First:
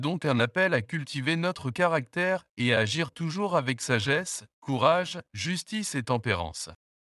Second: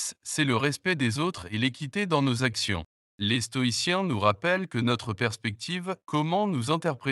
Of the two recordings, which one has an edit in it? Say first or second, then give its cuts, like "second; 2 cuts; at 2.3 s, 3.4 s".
second; 1 cut; at 3.0 s